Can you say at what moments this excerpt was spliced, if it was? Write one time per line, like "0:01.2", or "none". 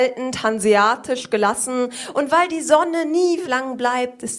0:03.4